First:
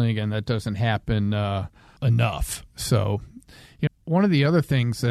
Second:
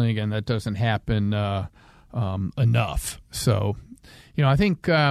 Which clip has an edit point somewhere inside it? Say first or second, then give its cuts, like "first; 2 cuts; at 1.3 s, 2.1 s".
first; 2 cuts; at 2.0 s, 3.9 s